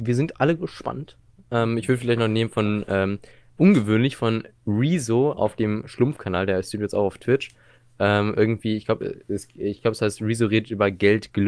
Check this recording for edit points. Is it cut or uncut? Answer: uncut